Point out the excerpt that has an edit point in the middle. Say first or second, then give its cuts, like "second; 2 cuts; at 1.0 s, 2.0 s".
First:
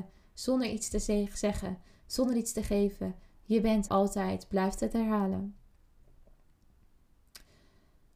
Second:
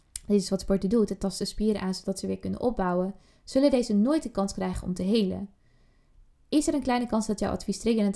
first; 1 cut; at 3.9 s